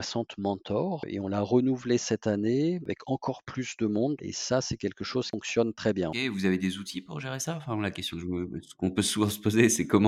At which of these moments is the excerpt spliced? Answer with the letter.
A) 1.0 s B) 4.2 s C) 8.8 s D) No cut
B